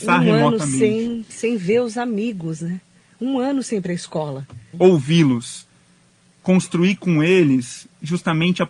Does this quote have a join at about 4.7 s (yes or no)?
yes